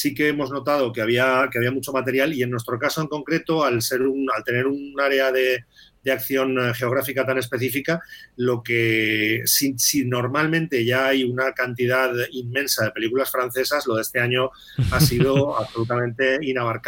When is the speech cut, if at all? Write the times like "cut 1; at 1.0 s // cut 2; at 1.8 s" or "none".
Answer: none